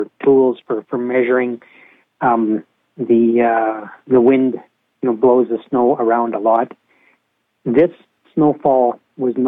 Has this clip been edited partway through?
no; 0 cuts

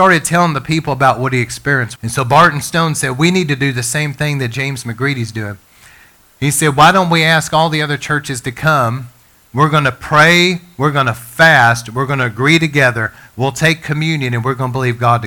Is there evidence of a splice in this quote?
yes; 1 cut; at 2.0 s

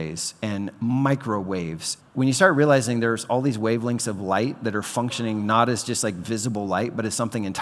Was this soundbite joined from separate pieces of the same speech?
yes; 1 cut; at 2.0 s

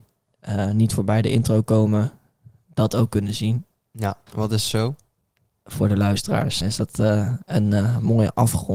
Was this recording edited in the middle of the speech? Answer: yes; 2 cuts; at 4.3 s, 6.6 s

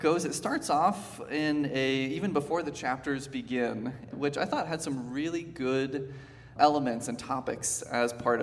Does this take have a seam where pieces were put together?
yes; 2 cuts; at 4.1 s, 6.6 s

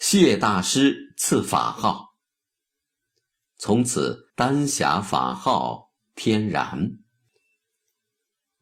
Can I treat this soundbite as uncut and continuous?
no; 1 cut; at 4.3 s

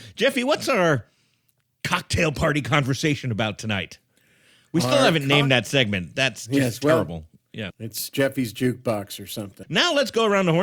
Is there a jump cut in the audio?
yes; 2 cuts; at 7.7 s, 9.6 s

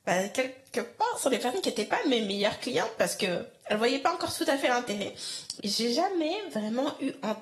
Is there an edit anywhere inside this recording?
yes; 1 cut; at 5.6 s

